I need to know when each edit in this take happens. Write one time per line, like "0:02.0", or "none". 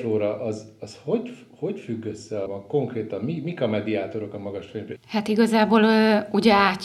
0:02.5
0:05.0